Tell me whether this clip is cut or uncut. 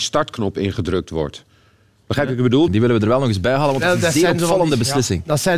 cut